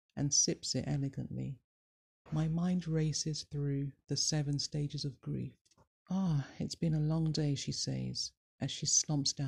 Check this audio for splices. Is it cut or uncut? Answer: cut